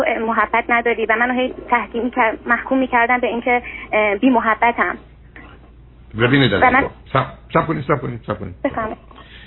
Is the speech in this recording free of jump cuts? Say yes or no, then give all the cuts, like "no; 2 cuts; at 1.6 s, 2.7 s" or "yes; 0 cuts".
yes; 0 cuts